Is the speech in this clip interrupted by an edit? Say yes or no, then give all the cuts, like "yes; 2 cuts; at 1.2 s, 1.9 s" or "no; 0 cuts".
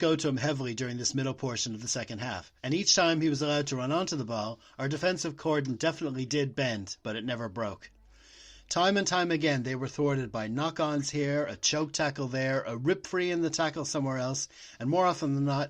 yes; 1 cut; at 2.6 s